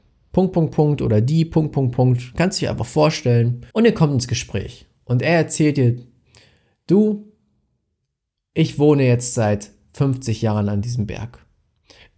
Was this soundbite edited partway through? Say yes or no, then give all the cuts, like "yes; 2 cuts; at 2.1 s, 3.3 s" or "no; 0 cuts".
yes; 1 cut; at 3.7 s